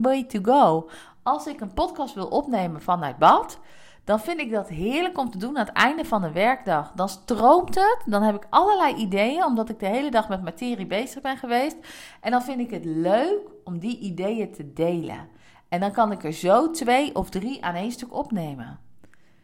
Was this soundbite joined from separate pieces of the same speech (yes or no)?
no